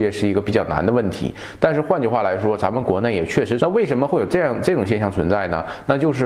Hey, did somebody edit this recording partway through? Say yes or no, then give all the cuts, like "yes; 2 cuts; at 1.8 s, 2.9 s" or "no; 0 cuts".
yes; 1 cut; at 3.6 s